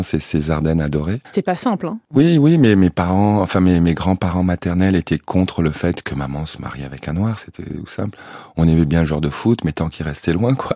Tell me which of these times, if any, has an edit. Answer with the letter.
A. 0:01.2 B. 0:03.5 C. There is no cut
A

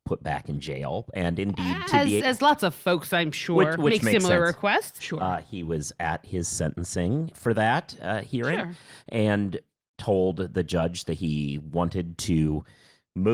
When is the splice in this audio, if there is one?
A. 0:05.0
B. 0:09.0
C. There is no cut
A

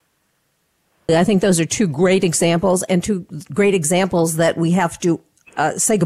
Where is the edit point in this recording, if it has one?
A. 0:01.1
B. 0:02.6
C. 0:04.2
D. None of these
A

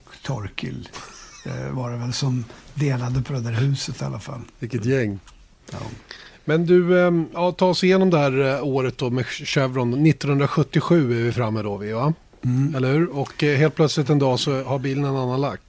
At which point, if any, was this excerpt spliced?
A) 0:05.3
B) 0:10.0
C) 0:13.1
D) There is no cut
D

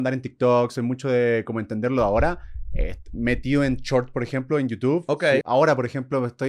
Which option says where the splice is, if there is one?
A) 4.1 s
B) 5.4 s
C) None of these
B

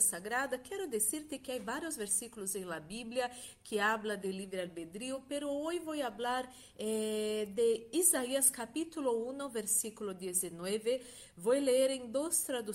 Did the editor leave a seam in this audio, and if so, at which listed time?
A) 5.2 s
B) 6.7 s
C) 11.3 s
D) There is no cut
D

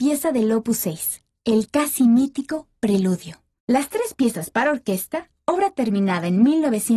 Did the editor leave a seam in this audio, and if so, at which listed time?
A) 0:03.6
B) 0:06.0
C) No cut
A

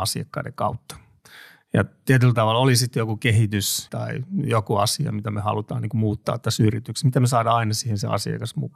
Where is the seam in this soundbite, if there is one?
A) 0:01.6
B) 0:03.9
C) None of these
B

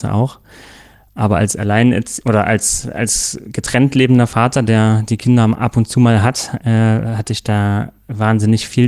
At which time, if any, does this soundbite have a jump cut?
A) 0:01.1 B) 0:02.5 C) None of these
C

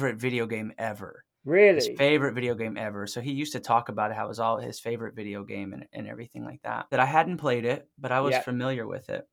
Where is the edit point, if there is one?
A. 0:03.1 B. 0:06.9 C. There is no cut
B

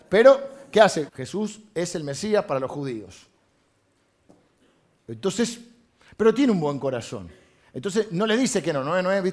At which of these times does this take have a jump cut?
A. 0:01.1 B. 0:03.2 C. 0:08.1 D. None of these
A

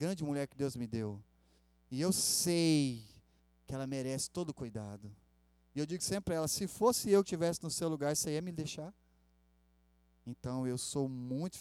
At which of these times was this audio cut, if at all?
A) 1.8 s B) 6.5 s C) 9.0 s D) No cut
D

